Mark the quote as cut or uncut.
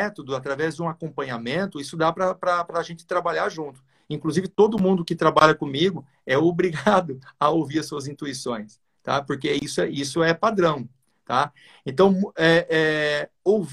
uncut